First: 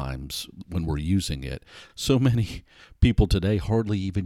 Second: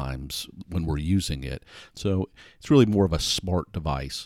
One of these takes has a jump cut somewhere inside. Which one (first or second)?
second